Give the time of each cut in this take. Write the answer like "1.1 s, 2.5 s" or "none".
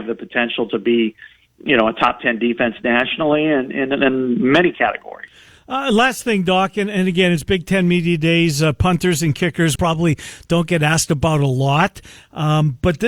9.8 s